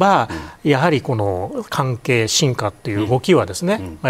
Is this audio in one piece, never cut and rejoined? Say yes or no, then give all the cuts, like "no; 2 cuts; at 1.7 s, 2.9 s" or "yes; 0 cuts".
yes; 0 cuts